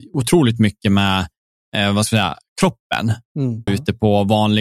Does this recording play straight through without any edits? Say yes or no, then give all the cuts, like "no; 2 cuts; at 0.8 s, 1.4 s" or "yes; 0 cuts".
no; 1 cut; at 3.7 s